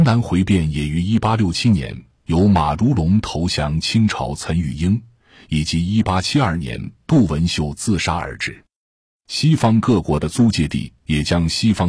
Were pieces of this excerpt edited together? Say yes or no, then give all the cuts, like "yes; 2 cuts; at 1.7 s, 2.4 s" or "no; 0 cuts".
no; 0 cuts